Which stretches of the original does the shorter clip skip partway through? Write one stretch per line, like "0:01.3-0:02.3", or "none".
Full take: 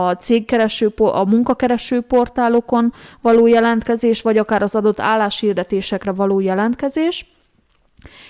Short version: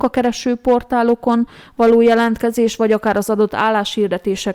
none